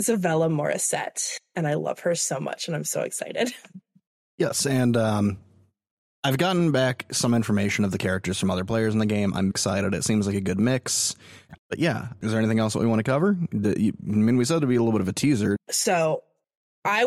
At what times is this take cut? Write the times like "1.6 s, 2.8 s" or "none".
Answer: 9.5 s, 15.6 s